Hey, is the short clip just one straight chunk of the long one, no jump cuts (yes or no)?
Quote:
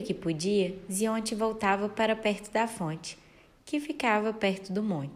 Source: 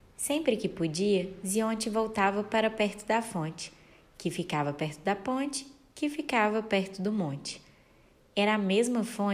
no